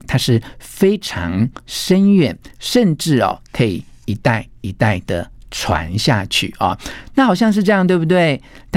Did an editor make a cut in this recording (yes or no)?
no